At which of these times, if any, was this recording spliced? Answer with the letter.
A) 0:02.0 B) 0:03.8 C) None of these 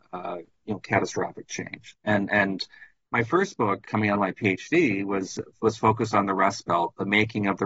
B